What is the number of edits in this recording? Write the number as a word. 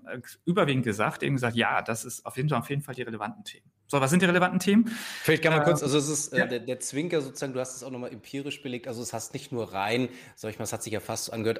zero